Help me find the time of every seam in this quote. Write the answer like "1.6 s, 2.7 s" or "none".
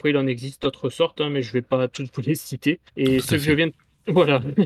2.9 s